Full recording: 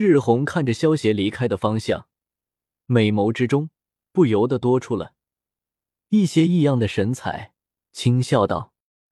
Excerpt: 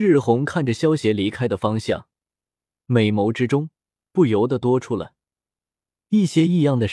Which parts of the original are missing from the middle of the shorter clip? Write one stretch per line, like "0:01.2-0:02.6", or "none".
none